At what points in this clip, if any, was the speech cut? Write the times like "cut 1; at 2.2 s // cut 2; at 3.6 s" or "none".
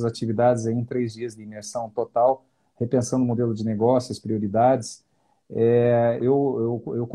cut 1; at 6.2 s